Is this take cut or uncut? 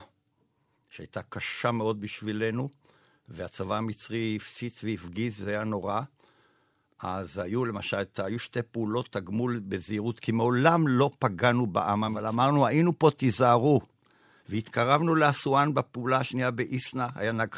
uncut